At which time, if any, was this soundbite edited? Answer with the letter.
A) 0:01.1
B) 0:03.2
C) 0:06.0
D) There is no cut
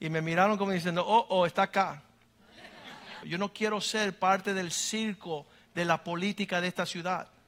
B